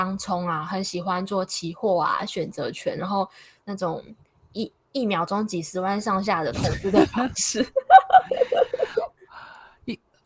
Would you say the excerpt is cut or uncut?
uncut